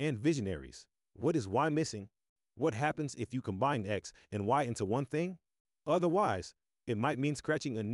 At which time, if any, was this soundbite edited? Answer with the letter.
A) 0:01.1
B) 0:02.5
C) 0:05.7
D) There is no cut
A